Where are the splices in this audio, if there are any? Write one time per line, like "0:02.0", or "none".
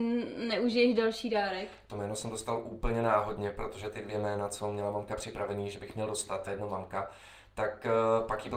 0:06.5

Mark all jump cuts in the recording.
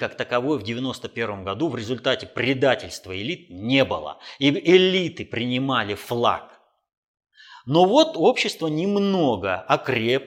none

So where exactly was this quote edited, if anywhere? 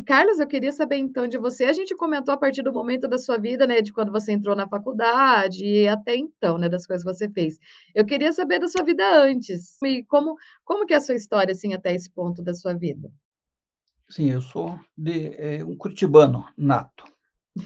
0:09.8

